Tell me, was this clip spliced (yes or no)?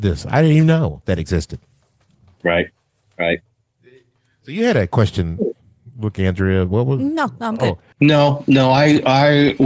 yes